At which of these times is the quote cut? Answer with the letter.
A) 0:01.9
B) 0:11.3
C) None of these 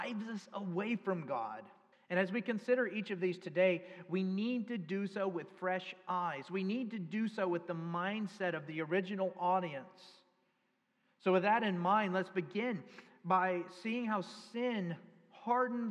A